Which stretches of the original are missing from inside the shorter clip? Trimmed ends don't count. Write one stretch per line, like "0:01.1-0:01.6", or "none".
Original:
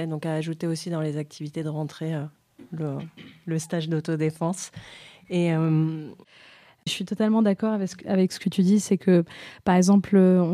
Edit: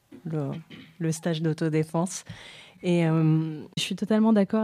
0:06.2-0:06.8